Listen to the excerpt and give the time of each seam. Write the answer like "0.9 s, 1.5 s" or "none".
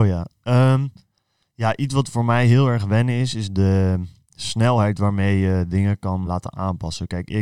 6.2 s